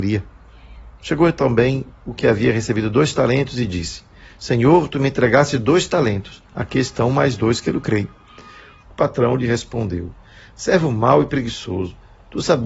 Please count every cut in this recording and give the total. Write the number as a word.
one